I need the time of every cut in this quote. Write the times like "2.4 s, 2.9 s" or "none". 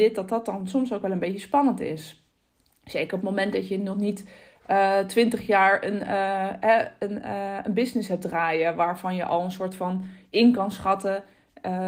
none